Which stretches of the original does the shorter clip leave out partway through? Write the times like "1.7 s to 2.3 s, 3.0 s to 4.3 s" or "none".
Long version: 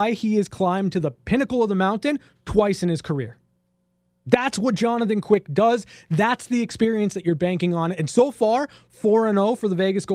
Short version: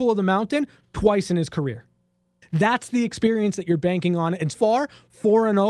3.9 s to 6.0 s, 8.1 s to 8.3 s

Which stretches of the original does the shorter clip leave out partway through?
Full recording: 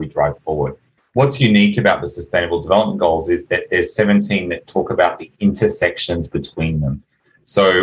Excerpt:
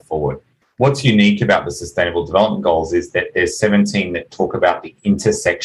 none

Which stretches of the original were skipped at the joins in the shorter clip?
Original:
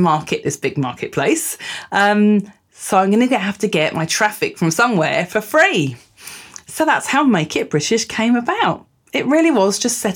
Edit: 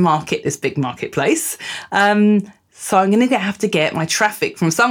none

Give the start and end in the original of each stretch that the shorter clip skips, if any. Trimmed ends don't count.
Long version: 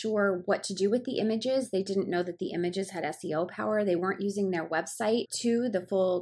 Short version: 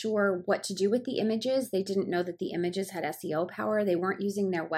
none

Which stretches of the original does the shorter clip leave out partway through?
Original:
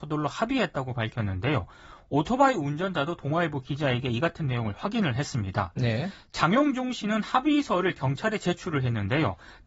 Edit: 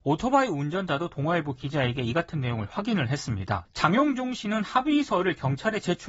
5.7 s to 6.2 s

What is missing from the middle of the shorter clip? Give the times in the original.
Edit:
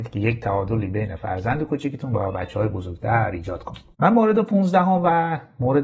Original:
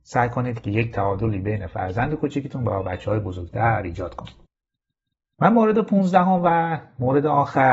4.4 s to 5.3 s

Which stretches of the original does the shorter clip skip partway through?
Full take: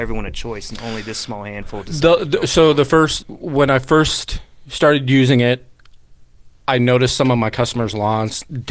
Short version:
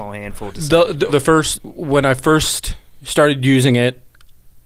2.4 s to 2.7 s

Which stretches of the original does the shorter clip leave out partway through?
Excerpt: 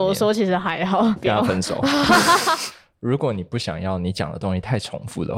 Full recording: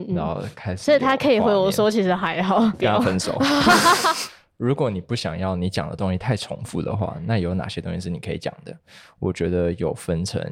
none

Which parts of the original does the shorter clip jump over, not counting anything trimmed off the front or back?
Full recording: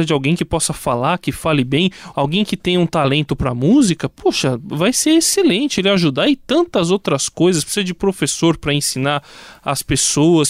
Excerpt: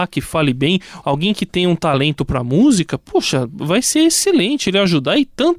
none

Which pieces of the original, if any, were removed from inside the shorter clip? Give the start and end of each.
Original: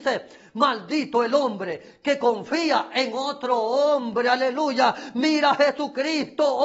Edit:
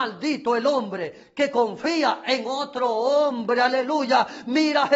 none

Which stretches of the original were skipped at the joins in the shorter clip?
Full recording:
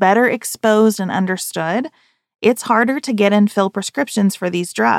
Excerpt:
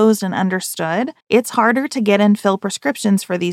2.0 s to 2.3 s

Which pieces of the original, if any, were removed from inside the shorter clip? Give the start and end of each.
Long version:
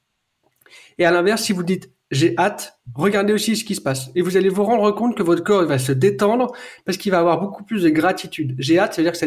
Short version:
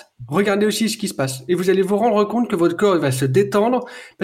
none

